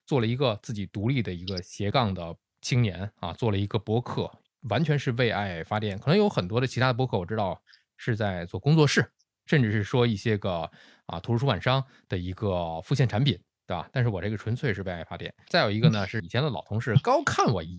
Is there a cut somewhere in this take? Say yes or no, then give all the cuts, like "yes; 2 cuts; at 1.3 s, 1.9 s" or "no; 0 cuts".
yes; 1 cut; at 15.5 s